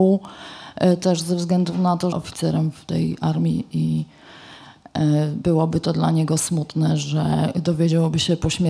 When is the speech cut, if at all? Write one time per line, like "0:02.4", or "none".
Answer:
0:02.1

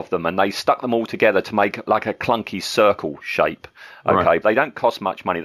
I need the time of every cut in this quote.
0:01.9
0:04.4

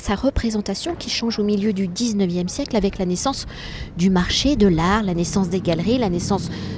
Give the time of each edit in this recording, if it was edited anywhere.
none

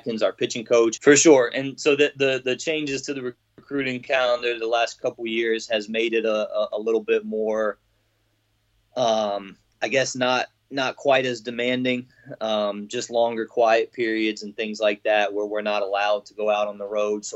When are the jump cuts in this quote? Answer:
0:01.0

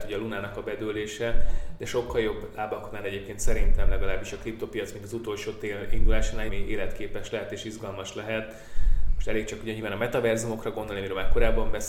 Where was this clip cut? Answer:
0:06.5

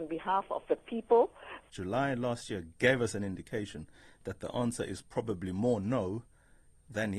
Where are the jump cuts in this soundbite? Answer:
0:01.7

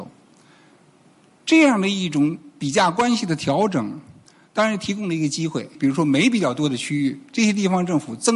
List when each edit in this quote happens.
0:05.7

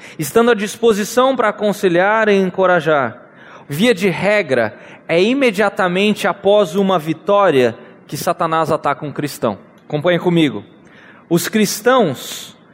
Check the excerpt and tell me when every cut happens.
0:03.6
0:09.8

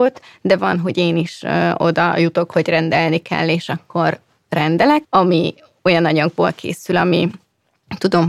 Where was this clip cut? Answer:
0:05.0

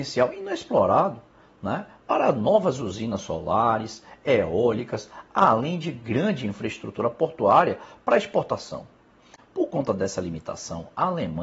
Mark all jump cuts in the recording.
0:09.4

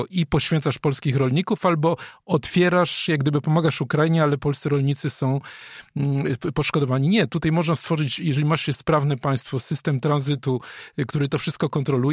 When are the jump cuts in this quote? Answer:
none

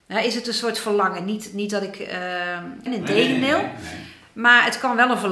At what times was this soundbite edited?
0:02.9

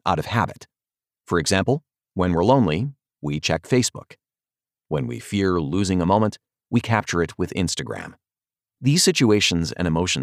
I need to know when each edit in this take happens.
none

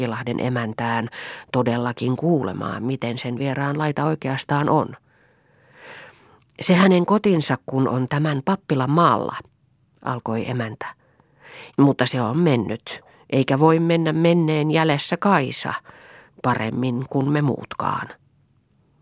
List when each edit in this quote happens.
0:11.7

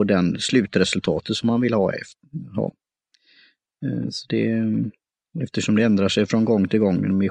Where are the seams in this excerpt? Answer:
none

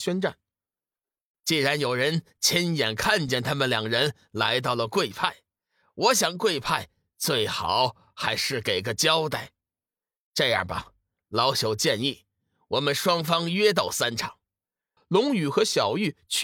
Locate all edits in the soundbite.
0:01.3
0:15.0

